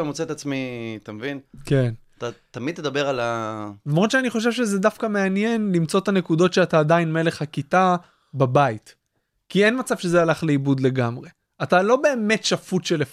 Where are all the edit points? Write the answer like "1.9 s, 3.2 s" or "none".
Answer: none

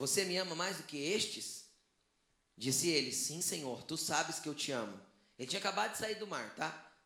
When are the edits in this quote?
none

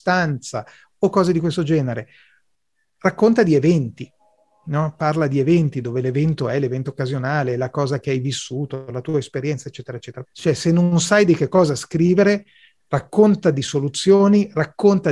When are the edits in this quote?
10.2 s

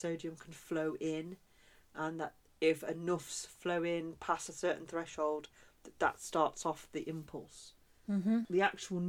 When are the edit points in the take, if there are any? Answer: none

